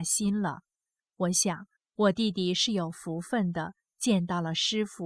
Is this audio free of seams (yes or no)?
yes